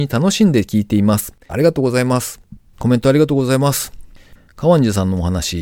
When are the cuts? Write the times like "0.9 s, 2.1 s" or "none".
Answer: 1.5 s, 2.7 s